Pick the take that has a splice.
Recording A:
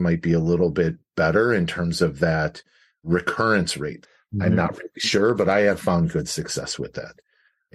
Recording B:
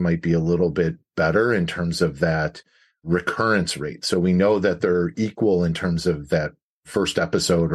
A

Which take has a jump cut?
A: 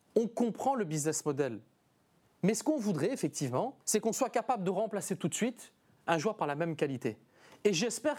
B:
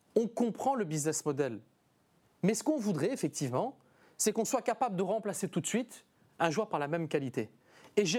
A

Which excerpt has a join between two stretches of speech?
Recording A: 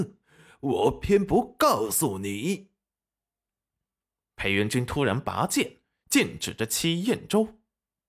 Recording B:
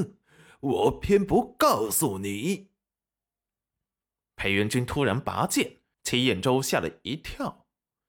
B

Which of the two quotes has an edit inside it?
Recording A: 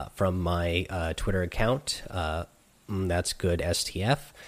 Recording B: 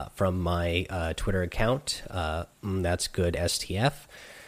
B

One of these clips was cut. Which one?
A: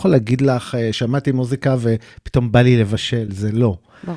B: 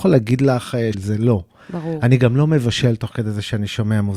B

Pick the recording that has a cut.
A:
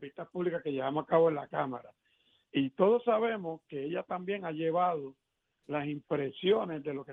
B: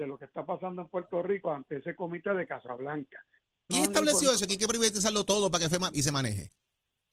B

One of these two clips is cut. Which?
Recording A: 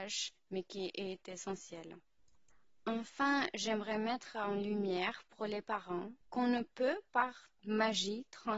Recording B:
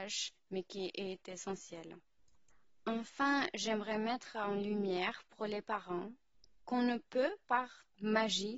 A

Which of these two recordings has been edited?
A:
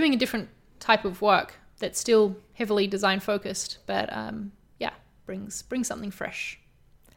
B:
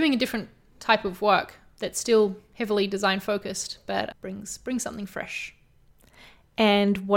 B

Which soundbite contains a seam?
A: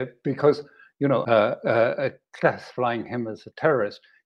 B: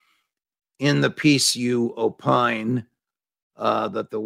A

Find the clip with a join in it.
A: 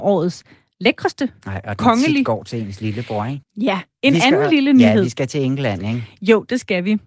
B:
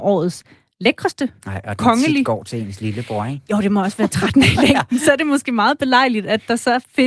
A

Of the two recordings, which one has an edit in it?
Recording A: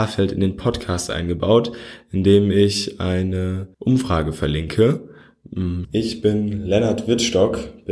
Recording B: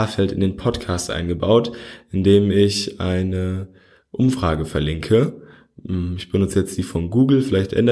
A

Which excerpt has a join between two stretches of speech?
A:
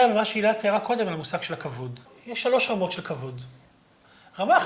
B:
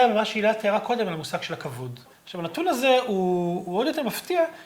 B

